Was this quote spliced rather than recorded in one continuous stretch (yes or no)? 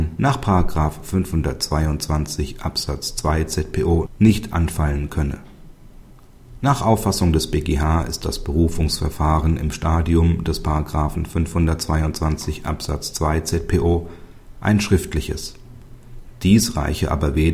no